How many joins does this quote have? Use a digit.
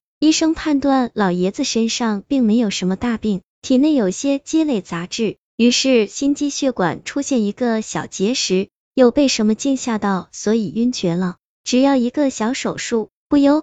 1